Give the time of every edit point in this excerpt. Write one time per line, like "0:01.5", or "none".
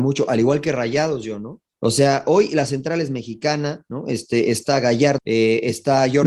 0:01.7
0:05.2